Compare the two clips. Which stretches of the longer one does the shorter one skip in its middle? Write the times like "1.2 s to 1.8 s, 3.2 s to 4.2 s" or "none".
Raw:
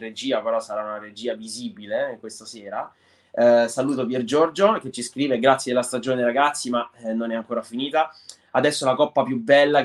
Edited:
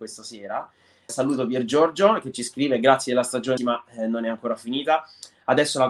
3.3 s to 3.7 s, 6.2 s to 6.6 s